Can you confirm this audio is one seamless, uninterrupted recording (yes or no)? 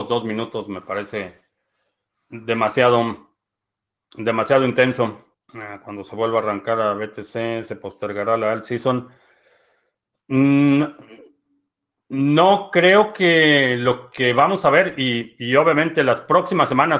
yes